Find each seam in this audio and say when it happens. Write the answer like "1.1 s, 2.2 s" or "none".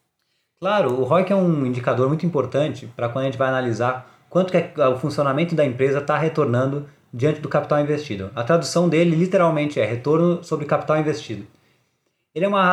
none